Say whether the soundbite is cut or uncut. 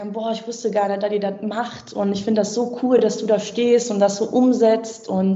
uncut